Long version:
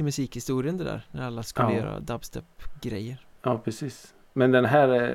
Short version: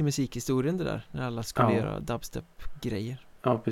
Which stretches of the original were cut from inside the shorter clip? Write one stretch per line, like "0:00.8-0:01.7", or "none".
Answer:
none